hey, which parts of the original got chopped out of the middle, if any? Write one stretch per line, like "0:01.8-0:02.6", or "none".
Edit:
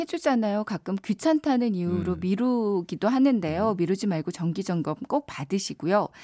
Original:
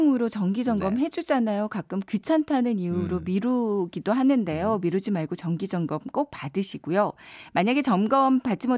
none